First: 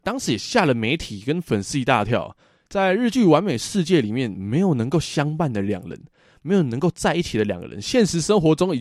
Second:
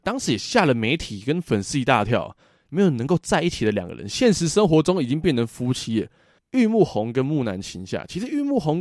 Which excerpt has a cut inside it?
second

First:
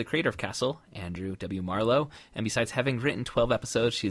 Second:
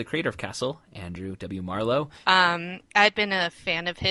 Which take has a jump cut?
second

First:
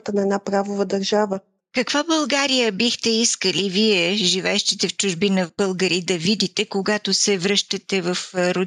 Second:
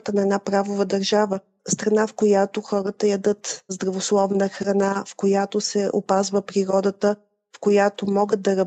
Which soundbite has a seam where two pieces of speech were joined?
first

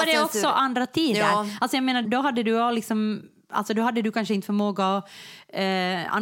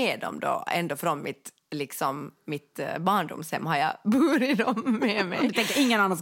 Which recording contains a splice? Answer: first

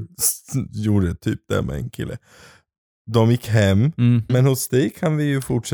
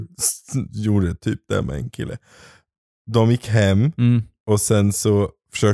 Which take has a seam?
first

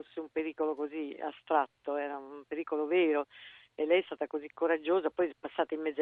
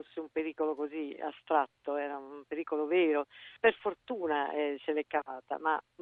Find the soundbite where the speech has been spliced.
second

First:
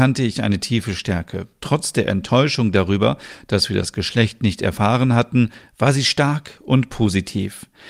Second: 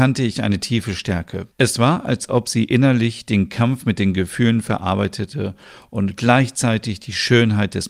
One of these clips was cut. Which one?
second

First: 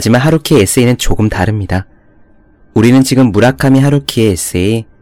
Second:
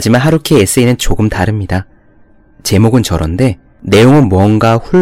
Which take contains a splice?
first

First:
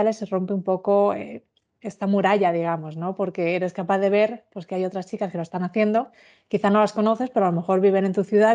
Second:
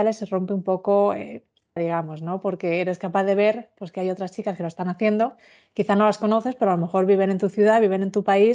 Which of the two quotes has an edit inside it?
second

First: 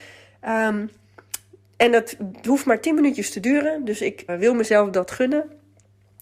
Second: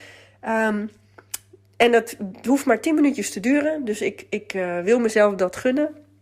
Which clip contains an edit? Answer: first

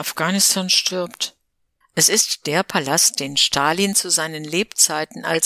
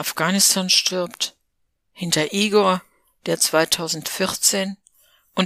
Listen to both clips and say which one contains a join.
first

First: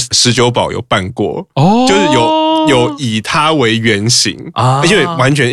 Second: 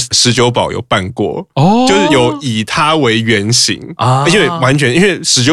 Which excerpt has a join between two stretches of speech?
second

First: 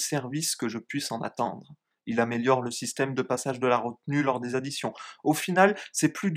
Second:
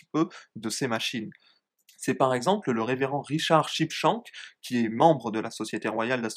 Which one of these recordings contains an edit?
first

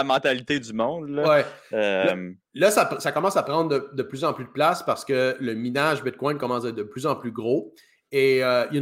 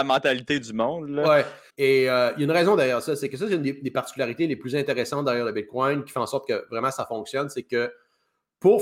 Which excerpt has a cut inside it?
second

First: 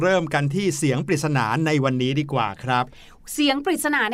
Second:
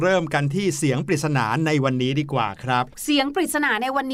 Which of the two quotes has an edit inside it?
second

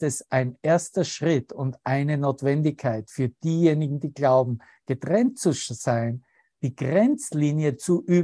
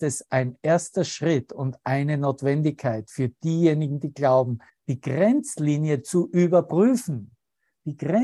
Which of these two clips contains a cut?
second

